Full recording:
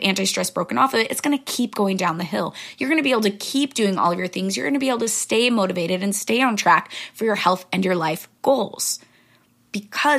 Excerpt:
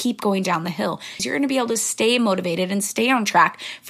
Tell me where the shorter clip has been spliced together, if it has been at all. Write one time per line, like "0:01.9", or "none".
0:01.2